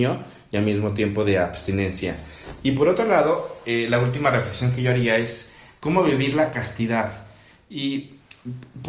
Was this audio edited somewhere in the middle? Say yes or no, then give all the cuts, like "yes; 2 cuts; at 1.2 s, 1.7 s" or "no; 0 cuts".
no; 0 cuts